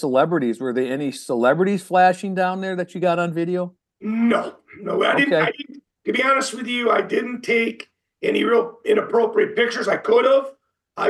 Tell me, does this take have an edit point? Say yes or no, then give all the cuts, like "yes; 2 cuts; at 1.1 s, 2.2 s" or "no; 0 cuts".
no; 0 cuts